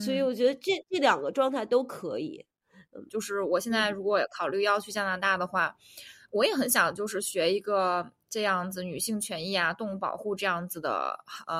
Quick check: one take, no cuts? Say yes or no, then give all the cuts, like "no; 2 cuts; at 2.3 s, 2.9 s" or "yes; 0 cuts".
no; 1 cut; at 3.1 s